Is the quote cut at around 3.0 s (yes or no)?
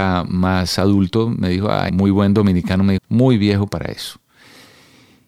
yes